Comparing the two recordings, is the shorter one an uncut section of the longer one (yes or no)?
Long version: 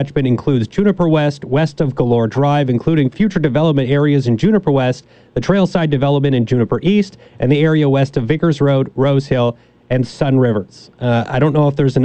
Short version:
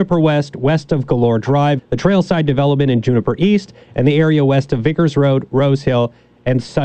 no